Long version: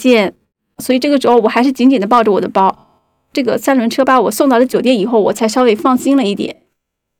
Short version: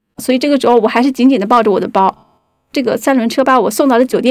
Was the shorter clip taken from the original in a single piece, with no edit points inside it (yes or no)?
yes